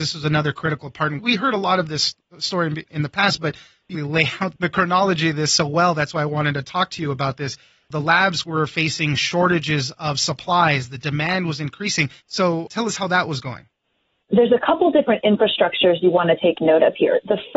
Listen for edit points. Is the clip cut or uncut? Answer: cut